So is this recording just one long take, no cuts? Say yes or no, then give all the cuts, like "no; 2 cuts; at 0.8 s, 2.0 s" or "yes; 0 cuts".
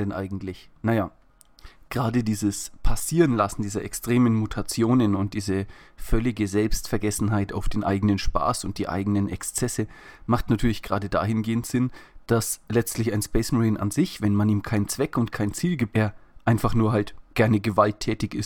no; 1 cut; at 15.9 s